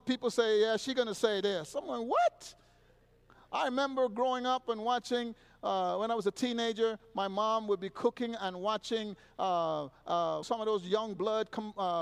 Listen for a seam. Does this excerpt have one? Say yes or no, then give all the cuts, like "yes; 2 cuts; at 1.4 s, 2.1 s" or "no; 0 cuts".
yes; 1 cut; at 10.4 s